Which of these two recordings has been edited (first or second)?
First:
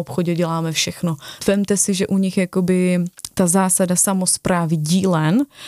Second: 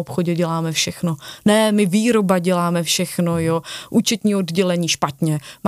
first